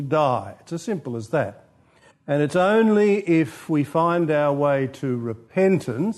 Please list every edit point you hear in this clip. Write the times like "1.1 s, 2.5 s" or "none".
2.1 s